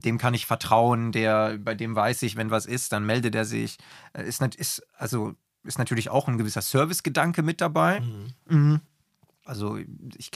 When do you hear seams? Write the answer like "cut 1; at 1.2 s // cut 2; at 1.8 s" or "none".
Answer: cut 1; at 9.4 s